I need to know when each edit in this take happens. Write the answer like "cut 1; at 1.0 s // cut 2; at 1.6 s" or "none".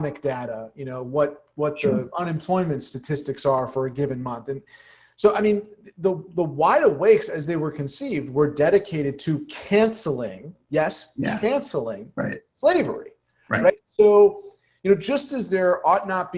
none